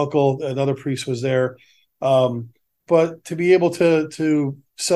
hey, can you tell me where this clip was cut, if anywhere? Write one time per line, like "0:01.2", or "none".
0:02.9